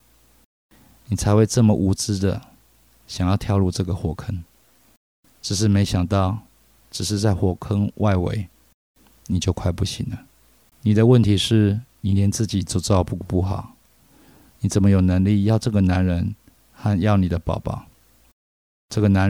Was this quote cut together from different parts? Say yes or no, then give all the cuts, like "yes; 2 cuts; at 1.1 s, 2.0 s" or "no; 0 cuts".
yes; 1 cut; at 10.7 s